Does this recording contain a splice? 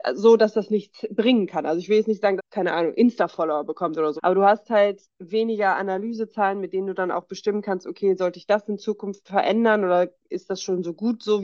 yes; 2 cuts; at 2.4 s, 4.2 s

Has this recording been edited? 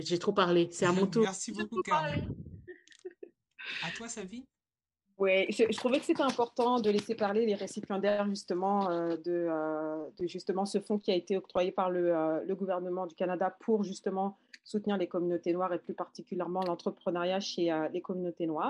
no; 0 cuts

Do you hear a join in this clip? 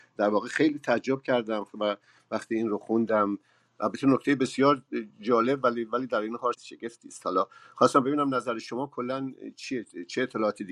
yes; 1 cut; at 6.5 s

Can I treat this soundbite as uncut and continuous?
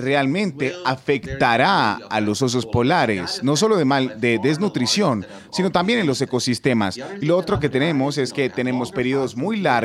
yes; 0 cuts

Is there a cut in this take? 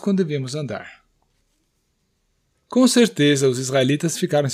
no; 0 cuts

